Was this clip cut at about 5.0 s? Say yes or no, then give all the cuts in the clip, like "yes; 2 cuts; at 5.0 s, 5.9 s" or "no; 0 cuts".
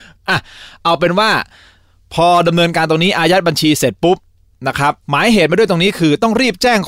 yes; 1 cut; at 5.0 s